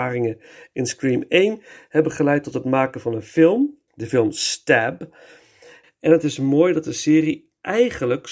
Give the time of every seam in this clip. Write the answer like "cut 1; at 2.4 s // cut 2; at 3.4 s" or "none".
cut 1; at 3.9 s // cut 2; at 5.8 s